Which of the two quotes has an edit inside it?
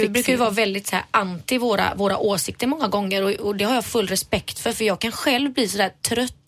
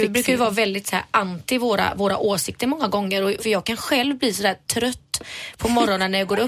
second; 1 cut; at 3.4 s

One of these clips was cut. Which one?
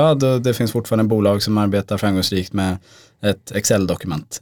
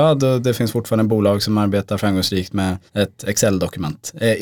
second; 1 cut; at 2.9 s

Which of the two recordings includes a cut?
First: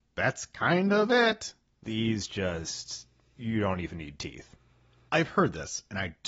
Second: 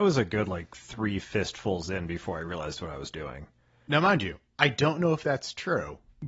first; 1 cut; at 1.8 s

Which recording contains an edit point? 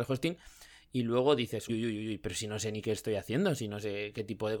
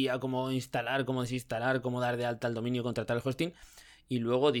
first; 1 cut; at 1.7 s

